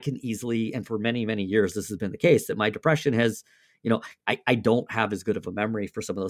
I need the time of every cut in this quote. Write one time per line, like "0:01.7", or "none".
none